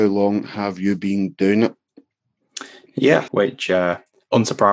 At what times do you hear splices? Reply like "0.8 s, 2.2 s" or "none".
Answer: 3.3 s